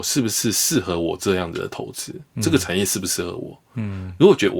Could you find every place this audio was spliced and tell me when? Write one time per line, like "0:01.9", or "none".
none